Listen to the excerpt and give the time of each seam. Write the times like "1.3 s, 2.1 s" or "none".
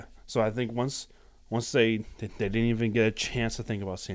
none